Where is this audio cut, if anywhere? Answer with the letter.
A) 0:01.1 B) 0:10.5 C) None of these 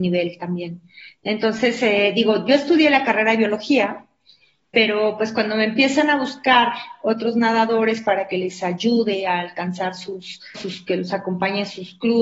B